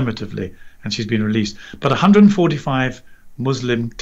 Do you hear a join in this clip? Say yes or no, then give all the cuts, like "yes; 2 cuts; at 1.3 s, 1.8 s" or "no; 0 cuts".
no; 0 cuts